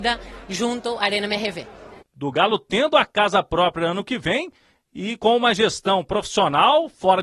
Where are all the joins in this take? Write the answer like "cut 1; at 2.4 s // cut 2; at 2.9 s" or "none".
cut 1; at 2.0 s